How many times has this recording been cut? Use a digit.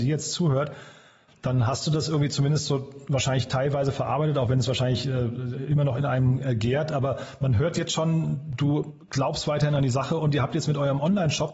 0